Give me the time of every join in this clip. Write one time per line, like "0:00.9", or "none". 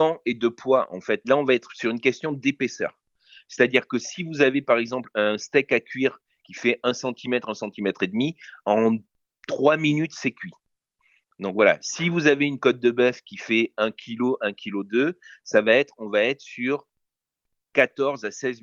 0:01.2